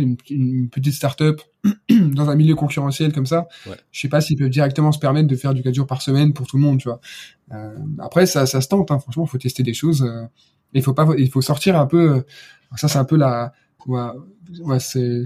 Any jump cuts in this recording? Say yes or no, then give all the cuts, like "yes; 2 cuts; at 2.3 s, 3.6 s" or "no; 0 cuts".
no; 0 cuts